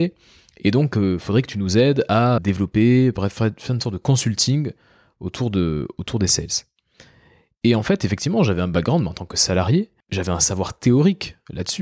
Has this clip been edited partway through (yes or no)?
yes